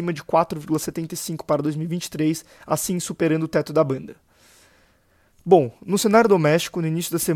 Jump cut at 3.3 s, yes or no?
no